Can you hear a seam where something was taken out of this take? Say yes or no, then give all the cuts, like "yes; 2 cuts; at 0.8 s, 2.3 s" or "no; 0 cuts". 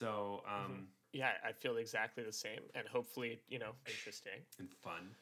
yes; 2 cuts; at 1.0 s, 3.9 s